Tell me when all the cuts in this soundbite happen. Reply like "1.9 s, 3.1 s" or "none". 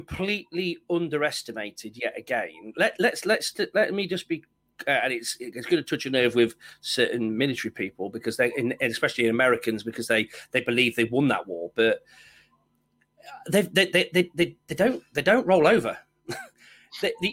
none